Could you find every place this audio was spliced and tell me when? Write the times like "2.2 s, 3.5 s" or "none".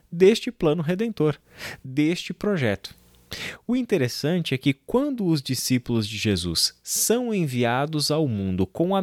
none

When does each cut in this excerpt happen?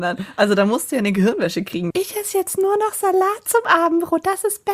1.9 s

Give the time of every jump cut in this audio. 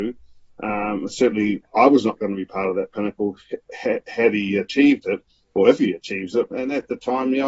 6.5 s

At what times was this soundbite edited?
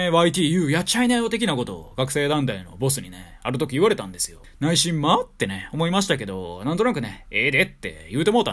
none

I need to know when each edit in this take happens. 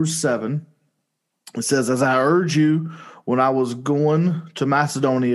none

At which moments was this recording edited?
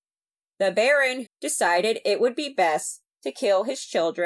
1.3 s

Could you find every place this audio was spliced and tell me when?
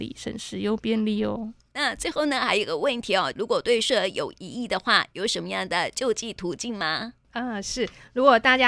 3.3 s

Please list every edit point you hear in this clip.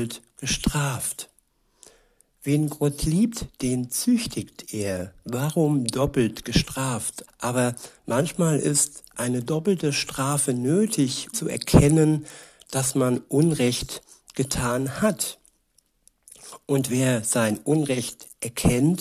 7.3 s, 11.3 s

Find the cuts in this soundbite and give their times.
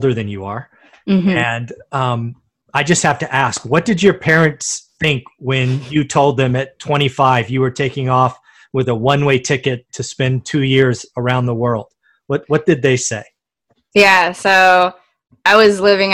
none

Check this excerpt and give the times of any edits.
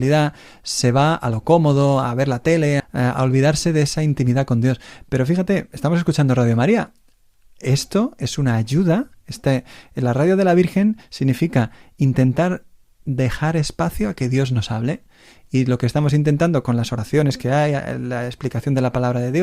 2.8 s

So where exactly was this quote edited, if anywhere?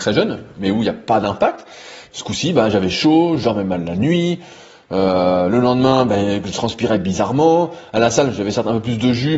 2.1 s

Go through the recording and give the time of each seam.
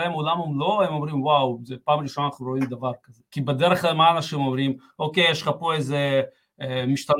3.3 s

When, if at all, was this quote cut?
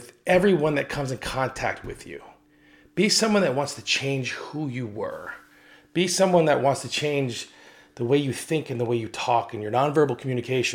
none

